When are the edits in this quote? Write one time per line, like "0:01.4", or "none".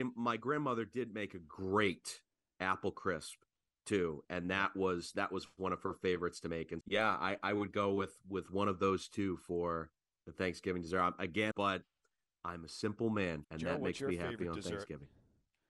0:06.8
0:11.5
0:13.4